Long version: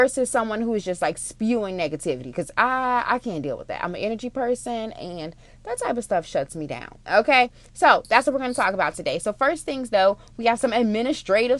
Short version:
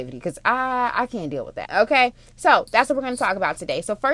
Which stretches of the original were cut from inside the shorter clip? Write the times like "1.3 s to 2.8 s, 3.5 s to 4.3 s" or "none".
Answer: 3.8 s to 7.0 s